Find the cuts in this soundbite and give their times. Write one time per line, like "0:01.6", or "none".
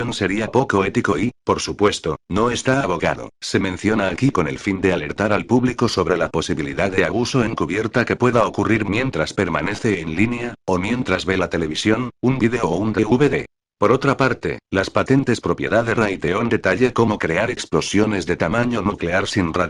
0:03.3